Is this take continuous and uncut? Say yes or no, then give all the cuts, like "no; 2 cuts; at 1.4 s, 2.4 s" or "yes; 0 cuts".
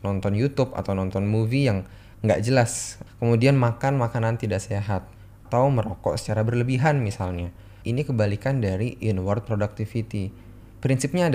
no; 1 cut; at 7.8 s